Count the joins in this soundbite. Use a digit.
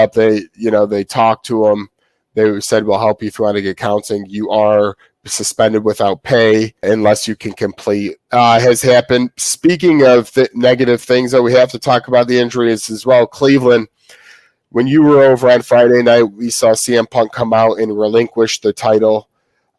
2